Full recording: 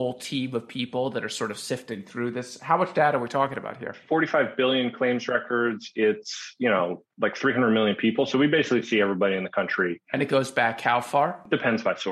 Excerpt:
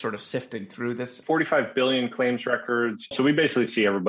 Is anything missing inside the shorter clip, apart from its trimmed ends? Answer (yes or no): yes